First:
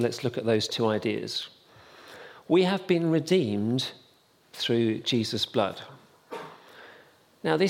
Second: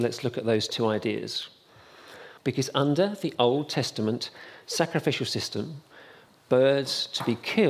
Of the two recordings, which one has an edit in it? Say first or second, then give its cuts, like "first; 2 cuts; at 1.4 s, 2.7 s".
second; 2 cuts; at 2.4 s, 6.3 s